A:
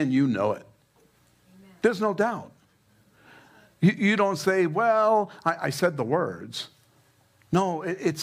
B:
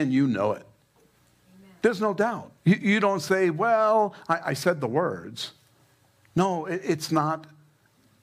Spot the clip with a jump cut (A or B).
B